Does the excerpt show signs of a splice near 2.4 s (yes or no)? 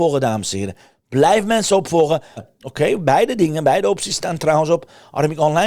yes